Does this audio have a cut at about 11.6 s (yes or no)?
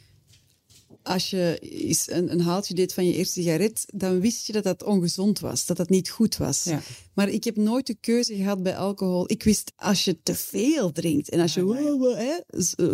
no